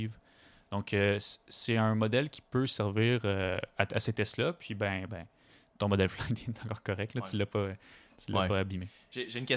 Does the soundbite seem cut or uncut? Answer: cut